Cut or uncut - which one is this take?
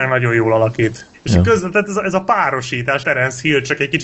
cut